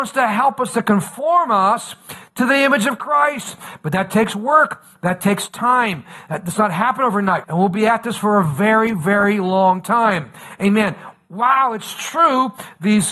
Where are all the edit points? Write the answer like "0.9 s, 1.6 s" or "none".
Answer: 7.4 s